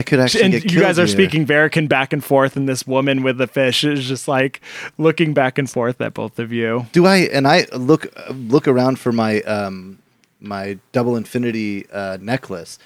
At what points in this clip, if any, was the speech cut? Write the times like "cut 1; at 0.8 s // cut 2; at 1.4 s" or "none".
none